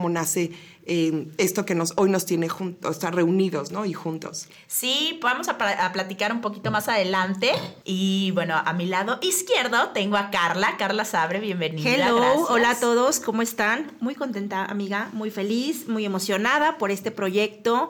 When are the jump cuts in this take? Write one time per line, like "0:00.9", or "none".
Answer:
0:07.8